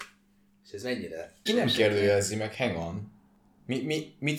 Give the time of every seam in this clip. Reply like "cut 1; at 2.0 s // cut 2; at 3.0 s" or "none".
cut 1; at 1.5 s